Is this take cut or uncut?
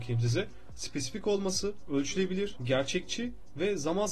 cut